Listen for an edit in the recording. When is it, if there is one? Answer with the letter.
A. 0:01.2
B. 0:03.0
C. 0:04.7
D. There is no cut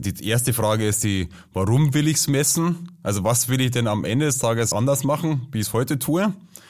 C